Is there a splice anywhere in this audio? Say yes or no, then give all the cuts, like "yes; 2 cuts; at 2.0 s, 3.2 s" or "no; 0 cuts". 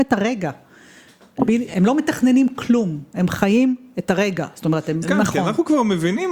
yes; 2 cuts; at 1.5 s, 5.0 s